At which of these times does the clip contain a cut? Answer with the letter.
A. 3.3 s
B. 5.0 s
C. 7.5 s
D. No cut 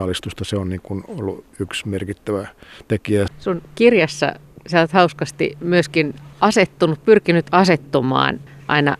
A